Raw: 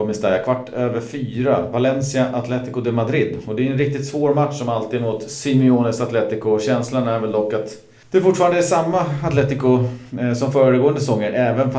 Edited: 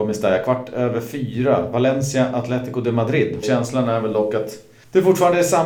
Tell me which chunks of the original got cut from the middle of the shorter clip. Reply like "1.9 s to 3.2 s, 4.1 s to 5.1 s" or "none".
3.4 s to 6.6 s